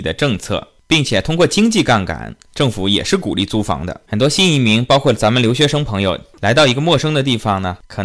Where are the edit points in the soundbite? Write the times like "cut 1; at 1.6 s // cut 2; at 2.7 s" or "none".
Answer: cut 1; at 4.1 s // cut 2; at 6.3 s